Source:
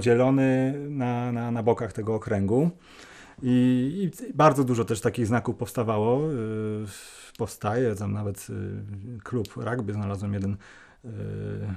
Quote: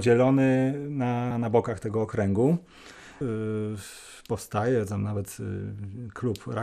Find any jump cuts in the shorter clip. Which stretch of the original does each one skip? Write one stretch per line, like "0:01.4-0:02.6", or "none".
0:01.3-0:01.4
0:03.3-0:06.3